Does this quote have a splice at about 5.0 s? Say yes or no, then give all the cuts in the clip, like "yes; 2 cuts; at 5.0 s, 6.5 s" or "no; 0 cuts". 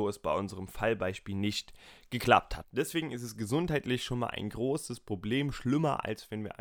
no; 1 cut; at 2.6 s